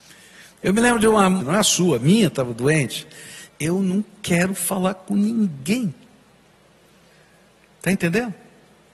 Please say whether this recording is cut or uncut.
cut